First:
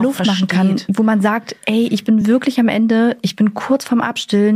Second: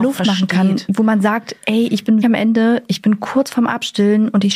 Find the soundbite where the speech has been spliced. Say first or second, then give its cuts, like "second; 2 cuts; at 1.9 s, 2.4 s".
second; 1 cut; at 2.2 s